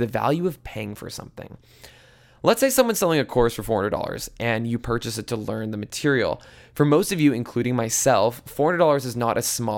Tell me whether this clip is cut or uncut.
uncut